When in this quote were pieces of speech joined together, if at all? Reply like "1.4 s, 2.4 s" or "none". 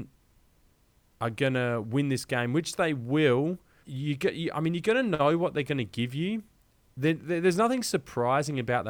3.8 s

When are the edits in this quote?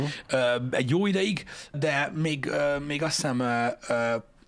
1.7 s

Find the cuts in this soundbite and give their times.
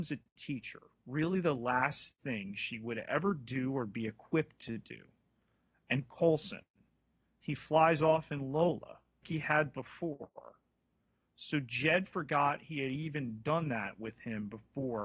9.2 s

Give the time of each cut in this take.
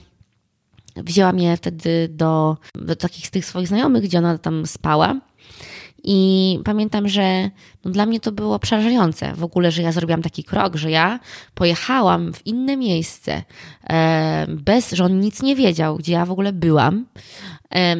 none

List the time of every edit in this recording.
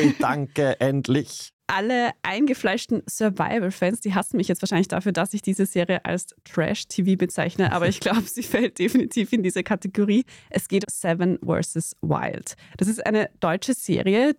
10.8 s

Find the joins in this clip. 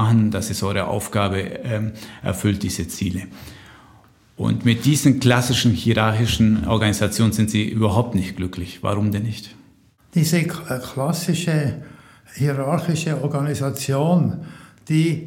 none

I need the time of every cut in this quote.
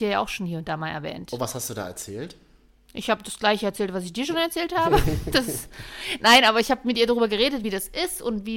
none

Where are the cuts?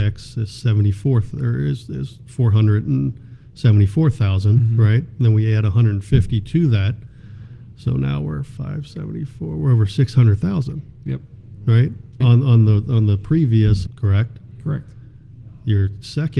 12.2 s, 13.9 s

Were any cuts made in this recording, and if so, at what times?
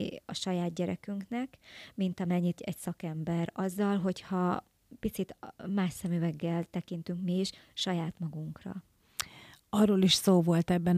2.6 s

